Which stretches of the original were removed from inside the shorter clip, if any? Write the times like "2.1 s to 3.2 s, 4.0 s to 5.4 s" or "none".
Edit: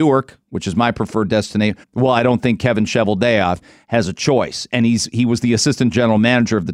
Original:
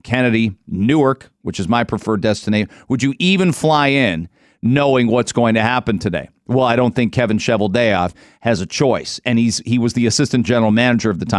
2.7 s to 6.4 s